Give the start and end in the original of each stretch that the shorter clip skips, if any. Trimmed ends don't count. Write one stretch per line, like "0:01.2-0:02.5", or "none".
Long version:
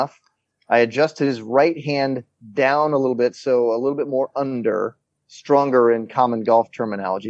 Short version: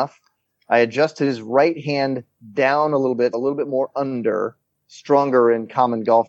0:03.3-0:03.7

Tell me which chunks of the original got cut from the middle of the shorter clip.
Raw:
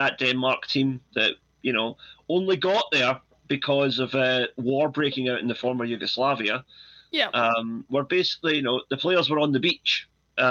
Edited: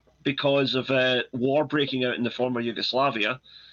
none

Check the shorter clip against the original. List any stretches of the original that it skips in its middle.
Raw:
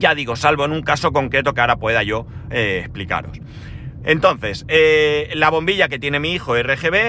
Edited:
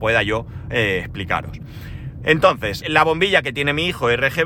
0:04.6-0:05.3

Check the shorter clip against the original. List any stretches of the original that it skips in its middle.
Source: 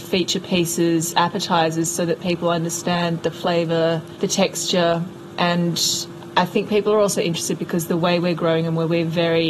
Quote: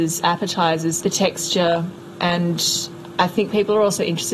0:01.9-0:04.2

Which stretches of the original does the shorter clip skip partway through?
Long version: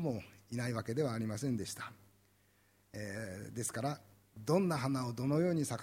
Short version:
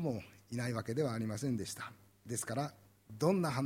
0:02.3-0:03.5

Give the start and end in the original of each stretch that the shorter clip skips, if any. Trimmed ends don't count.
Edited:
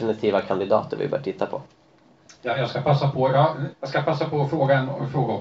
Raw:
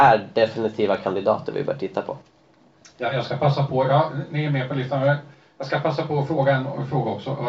0:04.3-0:05.5

